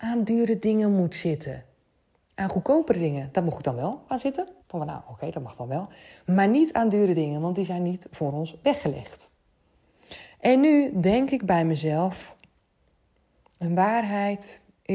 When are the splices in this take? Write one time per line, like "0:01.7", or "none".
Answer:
0:04.6